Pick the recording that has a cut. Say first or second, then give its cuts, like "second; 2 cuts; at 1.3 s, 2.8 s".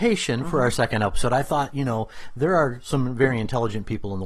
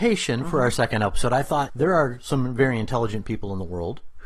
second; 1 cut; at 1.7 s